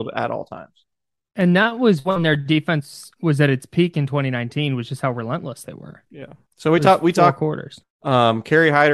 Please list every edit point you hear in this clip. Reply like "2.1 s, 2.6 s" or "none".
7.8 s

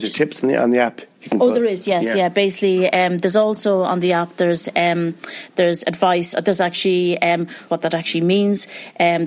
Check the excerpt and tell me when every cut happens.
7.7 s

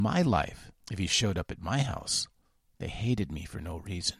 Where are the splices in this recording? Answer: none

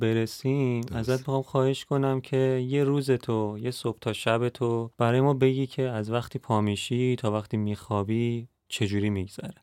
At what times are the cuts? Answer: none

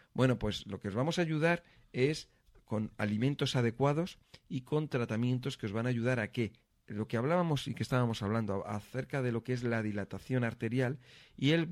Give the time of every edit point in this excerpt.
none

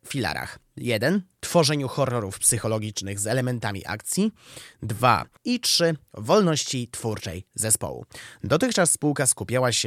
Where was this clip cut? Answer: 5.4 s

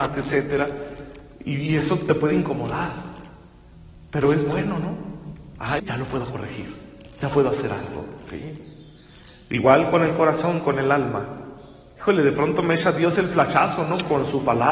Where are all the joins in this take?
5.8 s

